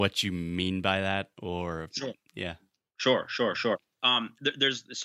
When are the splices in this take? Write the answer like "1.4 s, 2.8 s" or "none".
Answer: 4.0 s